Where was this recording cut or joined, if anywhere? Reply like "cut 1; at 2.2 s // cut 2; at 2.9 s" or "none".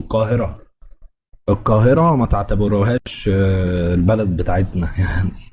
none